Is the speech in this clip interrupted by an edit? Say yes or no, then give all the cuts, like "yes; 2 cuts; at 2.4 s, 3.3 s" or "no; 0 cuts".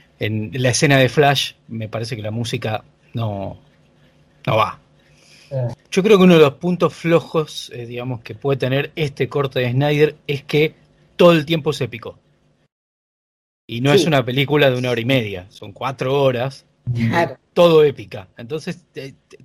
yes; 1 cut; at 5.7 s